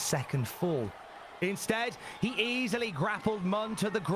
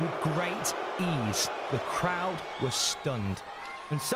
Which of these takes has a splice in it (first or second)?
first